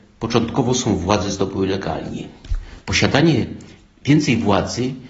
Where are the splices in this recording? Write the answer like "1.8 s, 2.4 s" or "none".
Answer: 2.8 s